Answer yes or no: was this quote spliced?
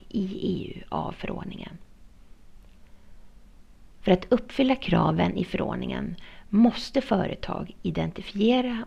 yes